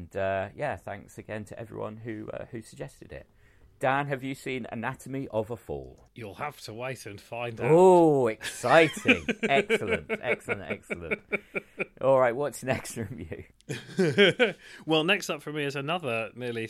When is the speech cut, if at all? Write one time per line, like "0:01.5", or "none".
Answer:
none